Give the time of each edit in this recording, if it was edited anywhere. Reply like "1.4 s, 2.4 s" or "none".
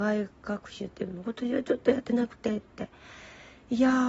none